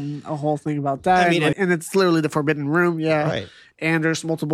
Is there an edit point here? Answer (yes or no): yes